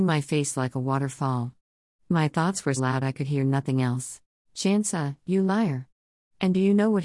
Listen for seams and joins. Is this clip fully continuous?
no; 2 cuts; at 2.8 s, 4.4 s

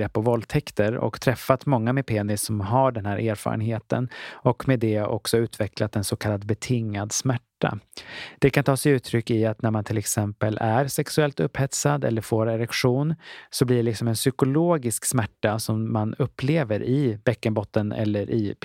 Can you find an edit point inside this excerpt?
no; 0 cuts

